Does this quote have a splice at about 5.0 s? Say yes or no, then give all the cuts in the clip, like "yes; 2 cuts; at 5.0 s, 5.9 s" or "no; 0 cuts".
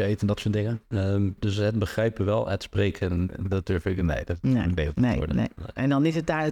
no; 0 cuts